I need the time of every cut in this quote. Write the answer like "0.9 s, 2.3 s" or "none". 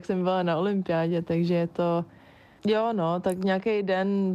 none